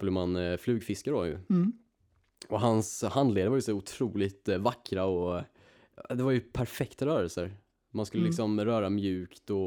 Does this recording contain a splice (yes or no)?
no